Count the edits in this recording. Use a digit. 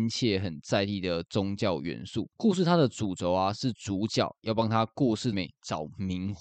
2